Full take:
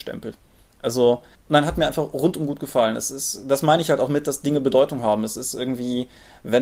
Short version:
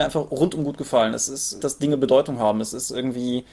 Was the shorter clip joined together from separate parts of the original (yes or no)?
yes